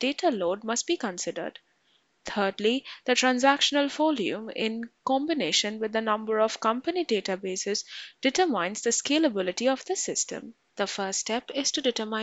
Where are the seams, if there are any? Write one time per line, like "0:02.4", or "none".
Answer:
0:10.7